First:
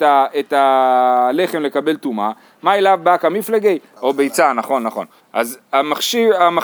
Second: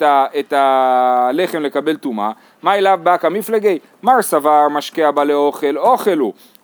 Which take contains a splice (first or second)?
first